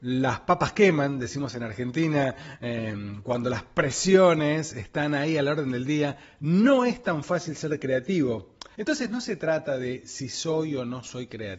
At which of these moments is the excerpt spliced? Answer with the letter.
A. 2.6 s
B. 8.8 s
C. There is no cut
B